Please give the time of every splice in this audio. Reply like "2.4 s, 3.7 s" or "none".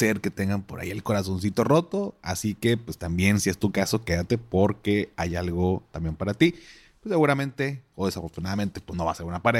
none